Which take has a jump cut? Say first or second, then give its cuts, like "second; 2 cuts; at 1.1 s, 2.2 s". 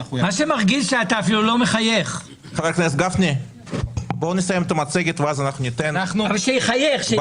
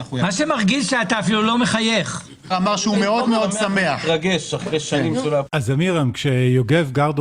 second; 2 cuts; at 2.5 s, 5.5 s